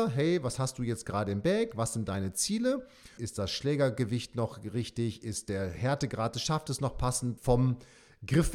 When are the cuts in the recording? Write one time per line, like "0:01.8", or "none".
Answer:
0:03.2
0:07.4

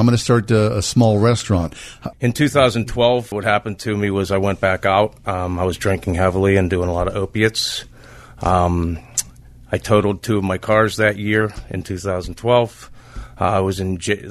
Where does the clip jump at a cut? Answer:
0:02.1
0:03.3

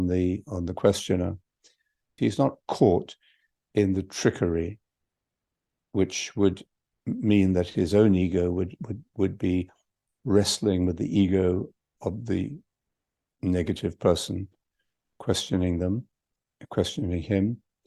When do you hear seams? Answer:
0:02.2

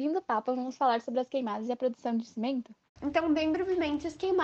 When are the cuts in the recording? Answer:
0:03.0

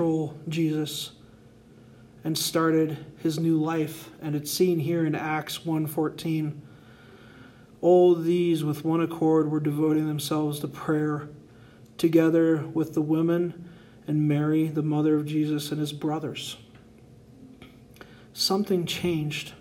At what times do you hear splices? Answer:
none

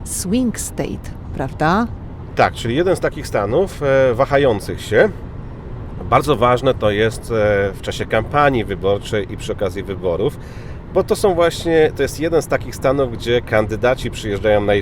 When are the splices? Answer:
none

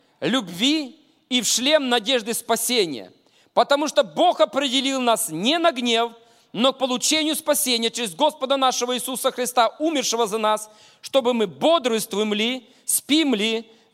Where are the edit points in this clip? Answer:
none

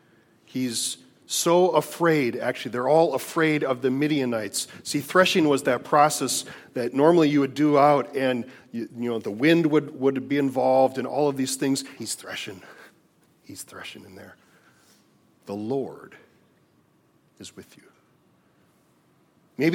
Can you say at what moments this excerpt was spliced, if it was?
0:12.0
0:15.4

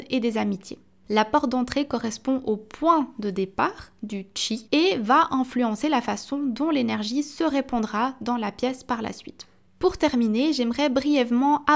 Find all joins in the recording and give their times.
0:04.7

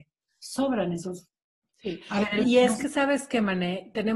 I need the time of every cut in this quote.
0:02.4

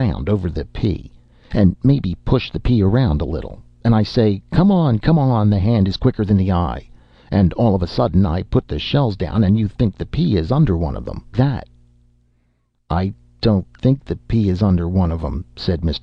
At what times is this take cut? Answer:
0:11.3

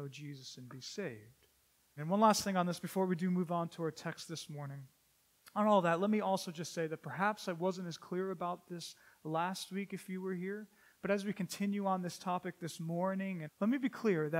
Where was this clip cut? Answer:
0:02.0
0:13.5

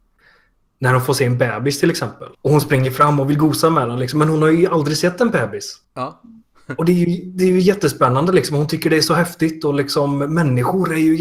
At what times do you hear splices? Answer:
0:02.3

